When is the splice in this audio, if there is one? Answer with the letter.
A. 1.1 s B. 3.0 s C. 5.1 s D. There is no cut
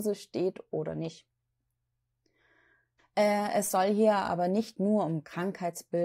B